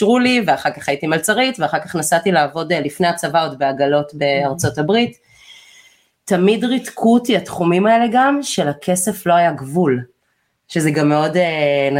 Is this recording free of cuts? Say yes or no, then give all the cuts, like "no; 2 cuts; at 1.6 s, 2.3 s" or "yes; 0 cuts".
yes; 0 cuts